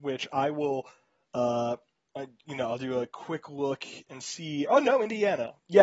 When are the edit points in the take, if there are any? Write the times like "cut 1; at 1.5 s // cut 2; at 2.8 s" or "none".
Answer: cut 1; at 4.7 s